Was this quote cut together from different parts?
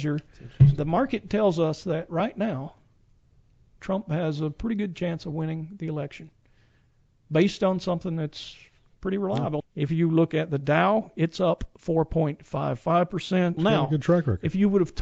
yes; 2 cuts; at 9.6 s, 13.6 s

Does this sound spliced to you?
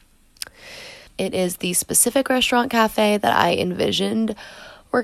yes; 1 cut; at 1.1 s

